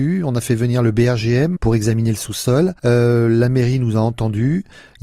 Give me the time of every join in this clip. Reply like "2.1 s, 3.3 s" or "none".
1.6 s, 2.8 s